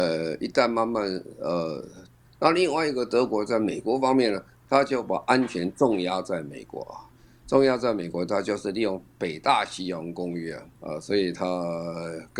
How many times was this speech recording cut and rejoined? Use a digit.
2